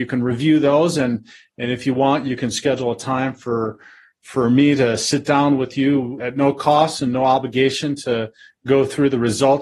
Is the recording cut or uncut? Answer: cut